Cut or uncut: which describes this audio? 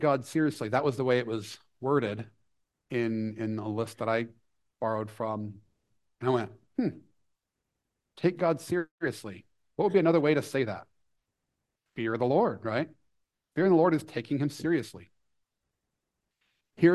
uncut